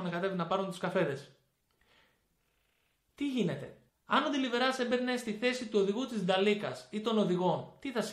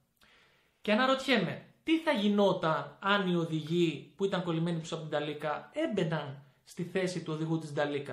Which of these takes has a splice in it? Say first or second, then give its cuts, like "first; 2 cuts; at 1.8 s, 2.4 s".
first; 1 cut; at 3.9 s